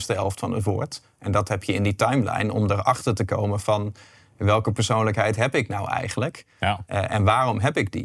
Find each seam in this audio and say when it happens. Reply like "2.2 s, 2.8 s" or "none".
none